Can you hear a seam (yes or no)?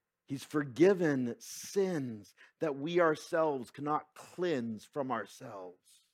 no